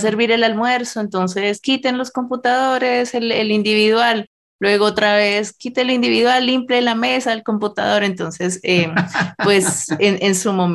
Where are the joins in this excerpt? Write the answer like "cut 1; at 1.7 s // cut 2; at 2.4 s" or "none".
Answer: none